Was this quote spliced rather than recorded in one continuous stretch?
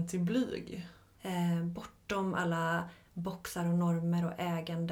yes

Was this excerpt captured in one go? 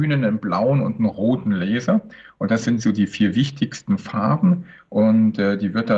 yes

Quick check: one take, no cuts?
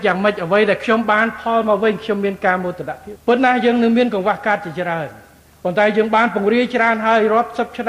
no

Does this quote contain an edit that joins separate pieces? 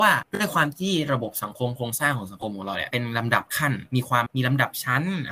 yes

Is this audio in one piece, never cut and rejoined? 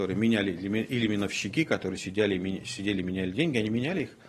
yes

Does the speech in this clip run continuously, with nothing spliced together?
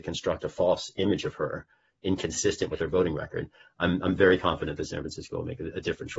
yes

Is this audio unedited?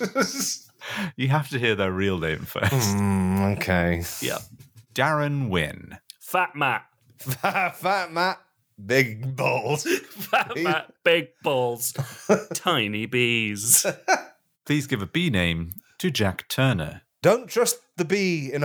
yes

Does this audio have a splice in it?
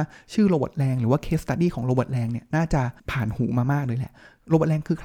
yes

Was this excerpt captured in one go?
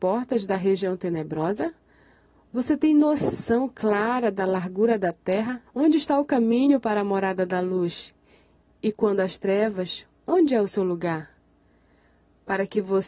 no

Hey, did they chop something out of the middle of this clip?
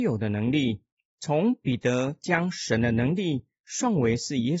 yes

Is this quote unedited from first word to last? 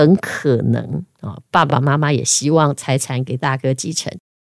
yes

